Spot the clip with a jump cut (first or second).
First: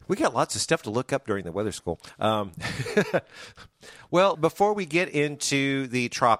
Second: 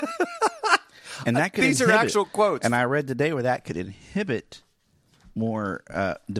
first